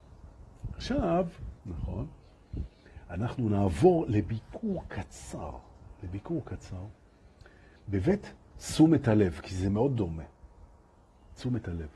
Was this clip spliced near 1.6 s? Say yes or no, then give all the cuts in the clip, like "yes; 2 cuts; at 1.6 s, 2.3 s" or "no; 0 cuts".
yes; 1 cut; at 1.6 s